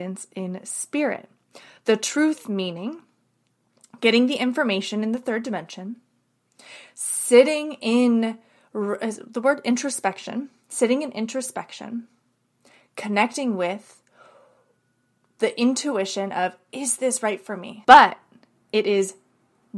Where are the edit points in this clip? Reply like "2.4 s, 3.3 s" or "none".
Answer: 17.8 s